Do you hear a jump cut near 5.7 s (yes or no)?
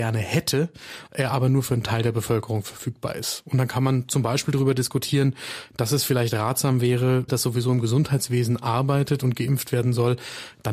no